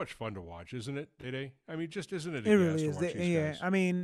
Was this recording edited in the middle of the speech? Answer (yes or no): no